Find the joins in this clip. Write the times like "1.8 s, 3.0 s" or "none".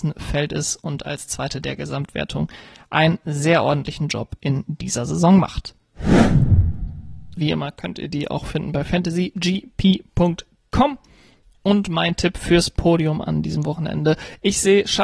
7.4 s